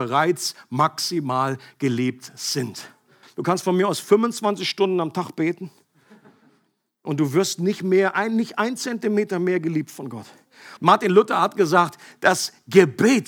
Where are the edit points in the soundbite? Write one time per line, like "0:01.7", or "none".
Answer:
0:03.2
0:10.8